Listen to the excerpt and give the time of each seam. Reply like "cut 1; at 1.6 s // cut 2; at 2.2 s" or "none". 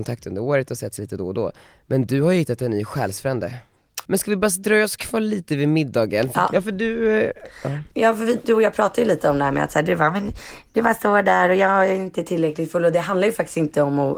cut 1; at 4.1 s // cut 2; at 6.5 s